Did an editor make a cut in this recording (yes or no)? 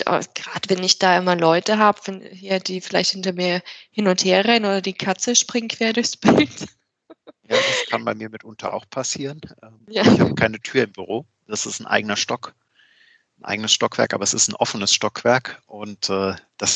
no